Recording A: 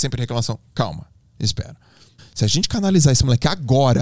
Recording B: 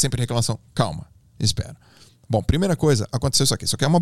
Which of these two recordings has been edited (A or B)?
A